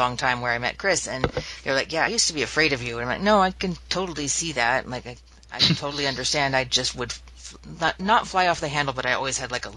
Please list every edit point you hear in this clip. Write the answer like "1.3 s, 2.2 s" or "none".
none